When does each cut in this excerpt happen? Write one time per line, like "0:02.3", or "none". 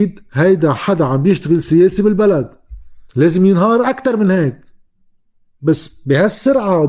0:03.1